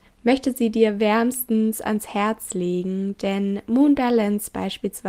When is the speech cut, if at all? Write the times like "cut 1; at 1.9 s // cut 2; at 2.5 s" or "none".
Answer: none